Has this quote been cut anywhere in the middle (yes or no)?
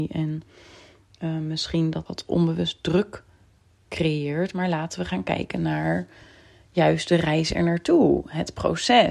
yes